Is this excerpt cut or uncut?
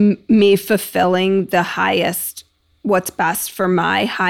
uncut